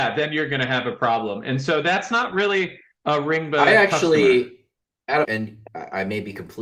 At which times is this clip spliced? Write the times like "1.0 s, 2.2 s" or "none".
5.2 s